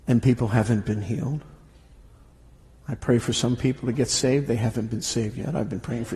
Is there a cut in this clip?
no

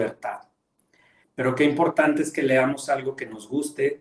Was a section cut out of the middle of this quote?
yes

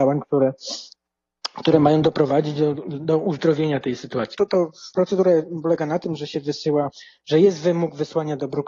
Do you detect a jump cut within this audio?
yes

